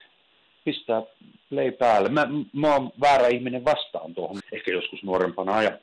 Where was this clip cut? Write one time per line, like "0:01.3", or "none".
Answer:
0:04.4